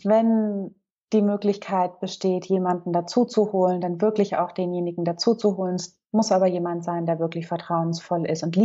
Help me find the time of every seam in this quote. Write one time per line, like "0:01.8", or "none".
none